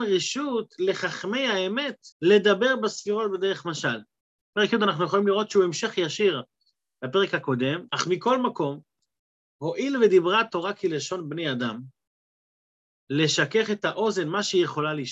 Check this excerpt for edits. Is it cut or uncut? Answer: cut